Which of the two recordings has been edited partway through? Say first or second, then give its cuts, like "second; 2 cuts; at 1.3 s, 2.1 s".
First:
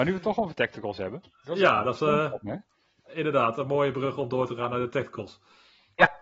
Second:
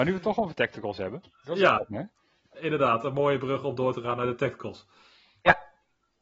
second; 1 cut; at 1.8 s